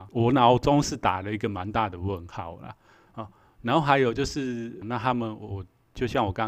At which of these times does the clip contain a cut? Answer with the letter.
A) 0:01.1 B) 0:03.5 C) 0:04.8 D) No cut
C